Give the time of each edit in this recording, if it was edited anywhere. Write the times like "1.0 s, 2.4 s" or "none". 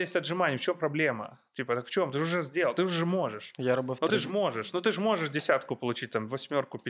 none